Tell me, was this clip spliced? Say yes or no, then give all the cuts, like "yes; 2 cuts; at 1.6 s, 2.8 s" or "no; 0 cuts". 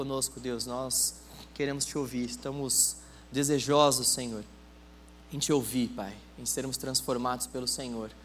no; 0 cuts